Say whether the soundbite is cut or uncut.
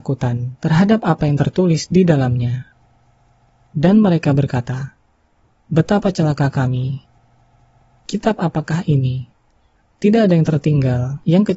uncut